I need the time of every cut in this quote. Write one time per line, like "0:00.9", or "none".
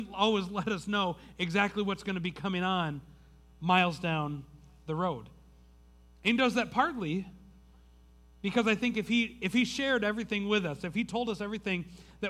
none